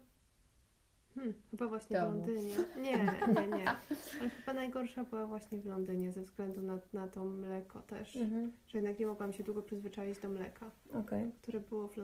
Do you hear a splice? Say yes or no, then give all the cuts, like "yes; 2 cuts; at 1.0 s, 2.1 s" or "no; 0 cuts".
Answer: no; 0 cuts